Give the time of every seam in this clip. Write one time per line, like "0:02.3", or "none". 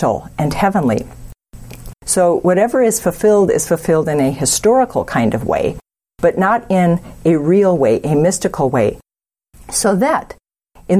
0:01.9
0:09.5